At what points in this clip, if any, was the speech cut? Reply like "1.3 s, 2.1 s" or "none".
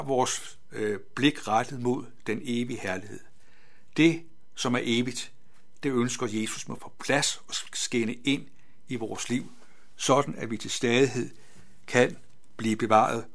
6.8 s